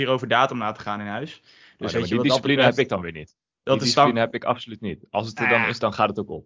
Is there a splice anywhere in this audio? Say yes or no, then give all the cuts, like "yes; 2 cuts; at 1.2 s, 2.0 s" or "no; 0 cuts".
no; 0 cuts